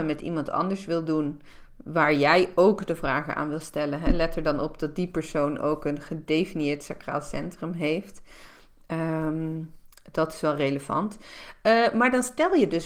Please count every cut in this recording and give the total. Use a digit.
0